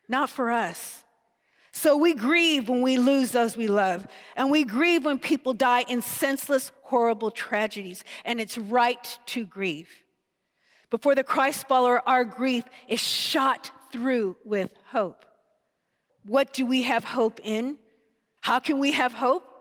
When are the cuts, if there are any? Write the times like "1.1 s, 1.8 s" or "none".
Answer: 16.1 s, 18.4 s